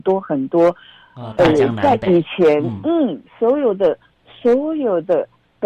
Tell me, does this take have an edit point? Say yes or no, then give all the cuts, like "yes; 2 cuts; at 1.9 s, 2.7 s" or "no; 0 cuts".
no; 0 cuts